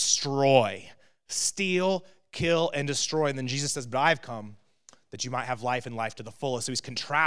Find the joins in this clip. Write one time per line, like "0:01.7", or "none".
none